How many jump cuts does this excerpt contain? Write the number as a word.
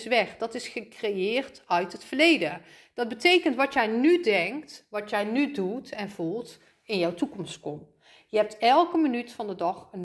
zero